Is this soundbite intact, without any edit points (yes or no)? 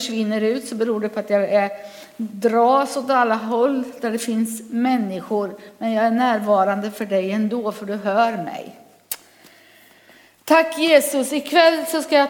yes